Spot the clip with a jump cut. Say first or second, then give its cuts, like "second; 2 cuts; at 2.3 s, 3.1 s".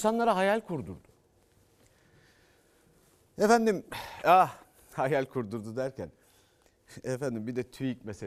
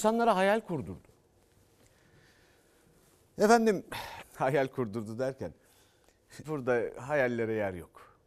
second; 2 cuts; at 4.2 s, 6.4 s